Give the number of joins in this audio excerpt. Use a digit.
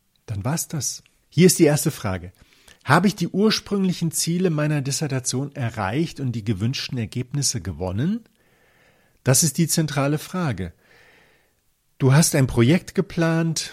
1